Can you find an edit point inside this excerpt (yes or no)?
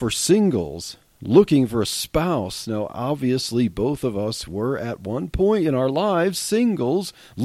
no